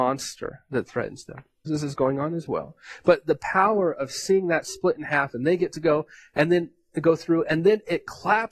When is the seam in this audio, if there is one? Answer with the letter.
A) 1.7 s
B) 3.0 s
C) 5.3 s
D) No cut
A